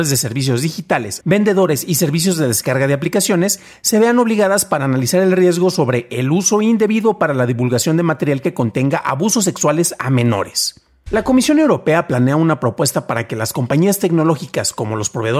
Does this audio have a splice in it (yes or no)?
yes